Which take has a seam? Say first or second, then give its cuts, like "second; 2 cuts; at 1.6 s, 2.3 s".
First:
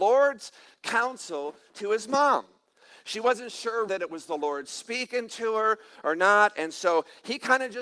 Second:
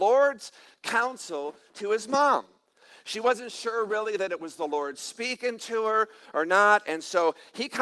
first; 1 cut; at 3.9 s